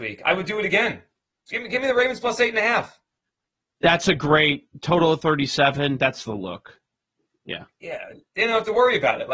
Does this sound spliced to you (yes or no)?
no